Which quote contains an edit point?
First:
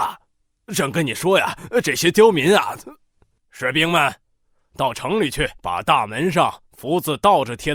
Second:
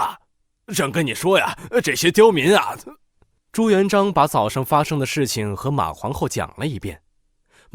first; 2 cuts; at 3.4 s, 5.6 s

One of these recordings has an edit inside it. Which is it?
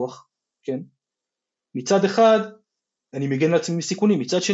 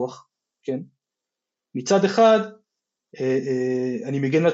first; 1 cut; at 3.1 s

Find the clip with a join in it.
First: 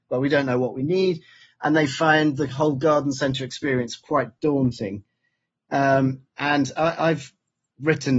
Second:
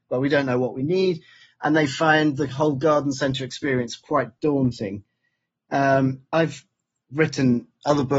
second; 1 cut; at 6.3 s

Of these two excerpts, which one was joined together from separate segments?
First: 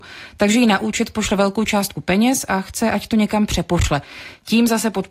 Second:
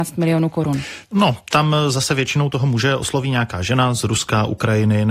second; 1 cut; at 1.0 s

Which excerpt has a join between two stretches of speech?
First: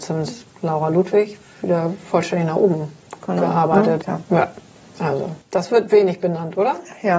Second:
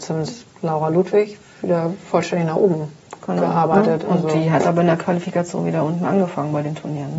first; 2 cuts; at 4.0 s, 5.4 s

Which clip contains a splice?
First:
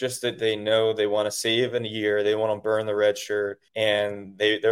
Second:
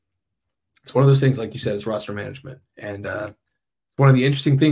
first; 1 cut; at 3.7 s

